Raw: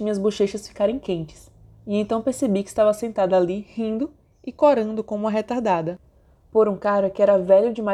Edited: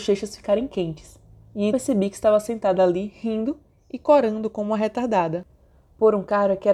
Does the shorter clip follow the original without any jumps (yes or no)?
no